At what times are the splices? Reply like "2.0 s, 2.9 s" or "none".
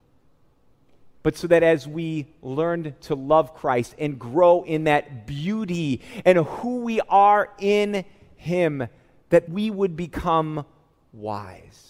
9.5 s